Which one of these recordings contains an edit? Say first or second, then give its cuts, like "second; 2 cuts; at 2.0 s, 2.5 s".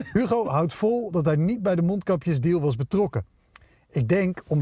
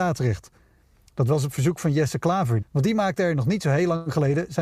second; 1 cut; at 2.6 s